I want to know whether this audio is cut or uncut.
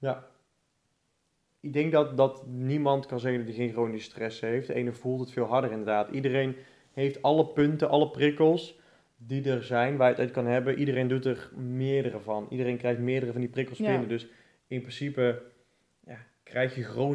uncut